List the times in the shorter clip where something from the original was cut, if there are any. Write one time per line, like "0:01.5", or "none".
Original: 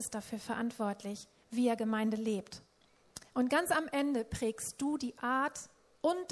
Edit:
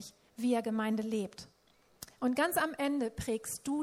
none